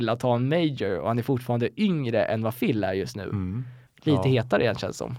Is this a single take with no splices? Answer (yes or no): no